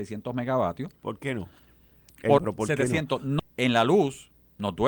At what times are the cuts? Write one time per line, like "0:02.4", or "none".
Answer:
0:02.4
0:03.4